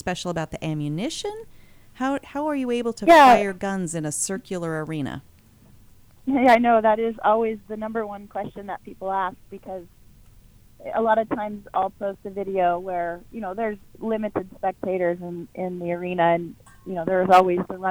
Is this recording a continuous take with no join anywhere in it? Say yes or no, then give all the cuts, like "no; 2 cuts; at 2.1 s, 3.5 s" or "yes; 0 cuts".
yes; 0 cuts